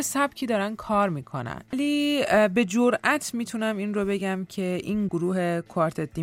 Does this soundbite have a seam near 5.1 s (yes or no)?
yes